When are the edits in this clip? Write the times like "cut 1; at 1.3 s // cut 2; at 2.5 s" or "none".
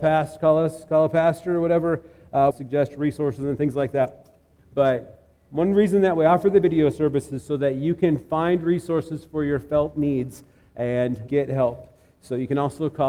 cut 1; at 2.5 s // cut 2; at 4.6 s // cut 3; at 11.3 s